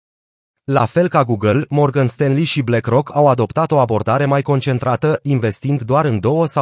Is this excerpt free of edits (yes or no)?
yes